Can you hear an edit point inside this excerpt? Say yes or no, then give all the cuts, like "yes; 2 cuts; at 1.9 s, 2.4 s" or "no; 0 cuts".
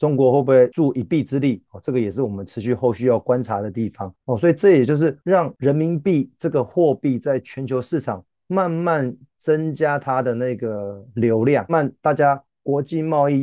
yes; 1 cut; at 11.7 s